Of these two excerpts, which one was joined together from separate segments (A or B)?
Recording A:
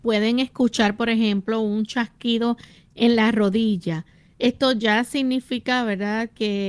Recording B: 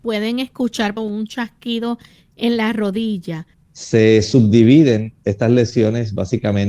B